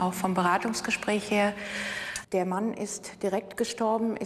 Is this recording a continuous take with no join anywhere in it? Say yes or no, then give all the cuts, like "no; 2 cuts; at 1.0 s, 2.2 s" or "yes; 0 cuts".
no; 1 cut; at 2.2 s